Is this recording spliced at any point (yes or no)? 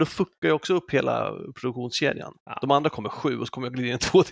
no